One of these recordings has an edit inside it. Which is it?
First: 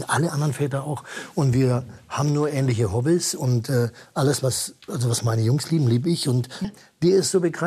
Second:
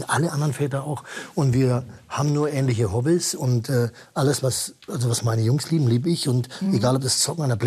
first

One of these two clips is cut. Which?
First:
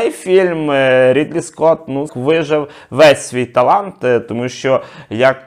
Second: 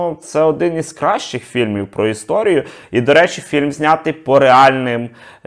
first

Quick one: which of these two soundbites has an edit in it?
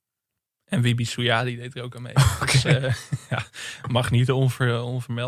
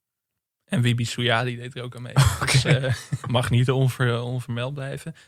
second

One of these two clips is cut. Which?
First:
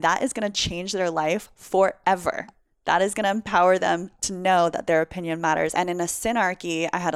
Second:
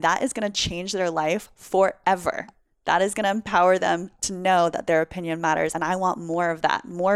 first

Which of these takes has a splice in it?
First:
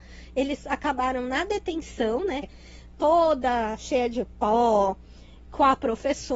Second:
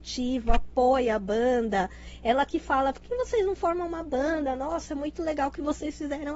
first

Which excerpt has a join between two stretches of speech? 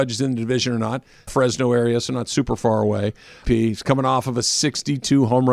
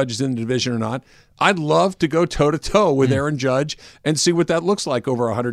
first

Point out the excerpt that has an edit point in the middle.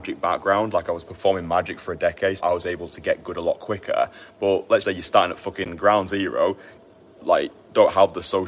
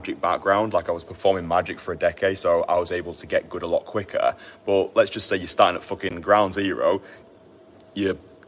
first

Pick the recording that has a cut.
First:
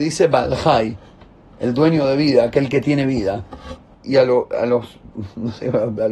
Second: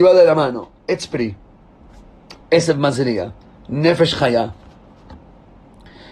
first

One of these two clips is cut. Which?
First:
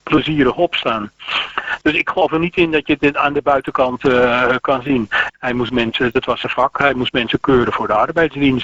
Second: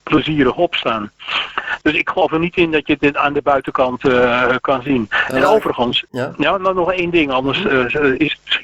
first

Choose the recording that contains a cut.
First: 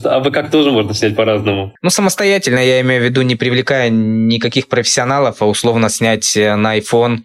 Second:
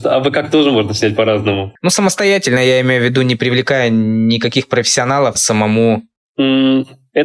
second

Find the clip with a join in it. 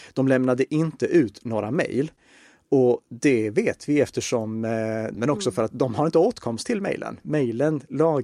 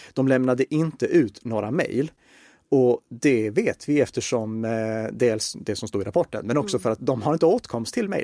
first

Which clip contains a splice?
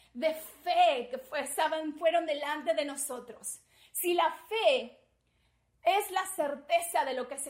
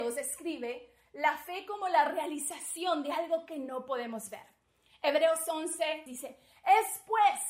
second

